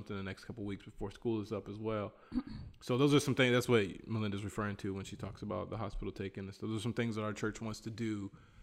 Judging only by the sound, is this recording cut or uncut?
uncut